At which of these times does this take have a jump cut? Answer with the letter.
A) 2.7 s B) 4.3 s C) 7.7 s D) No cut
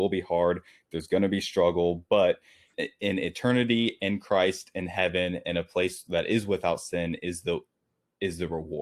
A